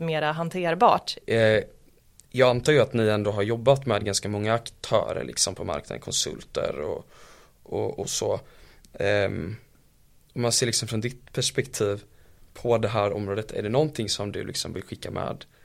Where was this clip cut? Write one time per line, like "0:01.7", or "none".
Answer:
0:01.2

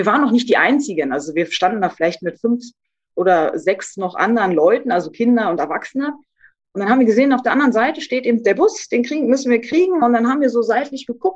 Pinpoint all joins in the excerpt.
none

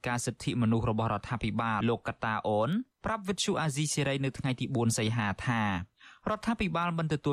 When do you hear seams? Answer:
0:01.8

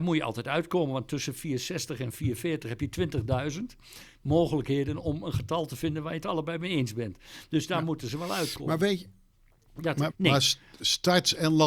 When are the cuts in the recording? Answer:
0:10.1

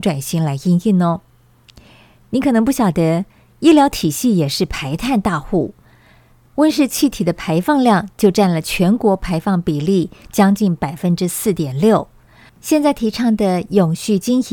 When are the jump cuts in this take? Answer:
0:12.5

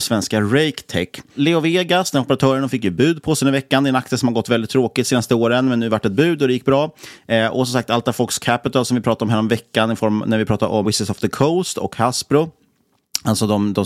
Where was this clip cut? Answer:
0:10.8

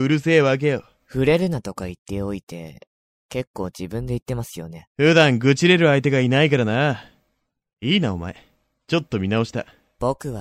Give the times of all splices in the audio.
0:01.0

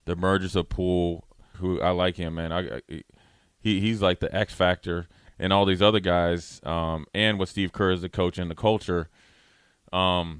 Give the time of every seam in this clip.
0:01.5

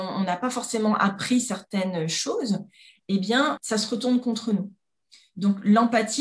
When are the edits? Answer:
0:03.6

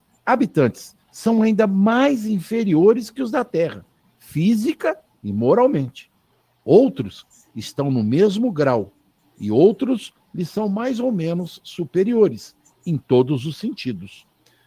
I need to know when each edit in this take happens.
none

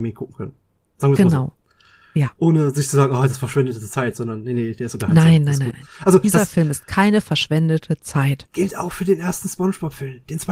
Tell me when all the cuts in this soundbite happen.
0:05.7

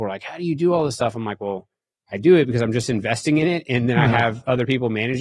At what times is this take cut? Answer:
none

